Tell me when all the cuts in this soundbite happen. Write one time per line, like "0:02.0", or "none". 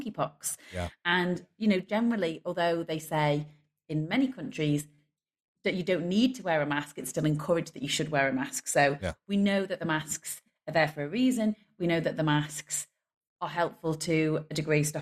none